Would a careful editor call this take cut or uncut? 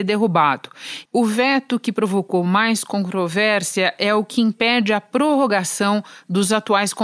cut